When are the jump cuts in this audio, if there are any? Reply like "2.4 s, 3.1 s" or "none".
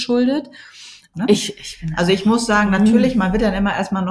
1.1 s